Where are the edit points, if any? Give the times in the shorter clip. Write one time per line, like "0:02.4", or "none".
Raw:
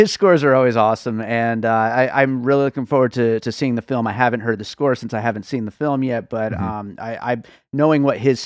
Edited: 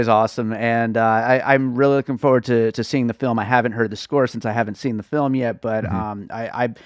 none